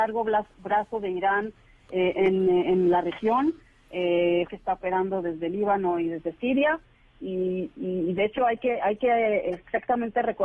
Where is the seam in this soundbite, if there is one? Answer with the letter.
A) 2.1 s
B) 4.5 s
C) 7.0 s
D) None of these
B